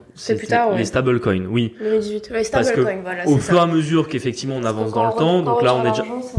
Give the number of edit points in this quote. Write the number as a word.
zero